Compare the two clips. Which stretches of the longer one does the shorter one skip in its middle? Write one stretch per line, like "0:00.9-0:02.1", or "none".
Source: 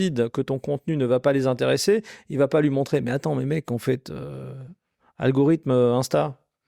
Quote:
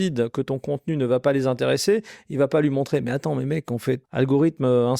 0:04.0-0:05.1